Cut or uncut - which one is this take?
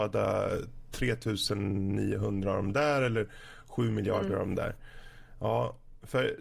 uncut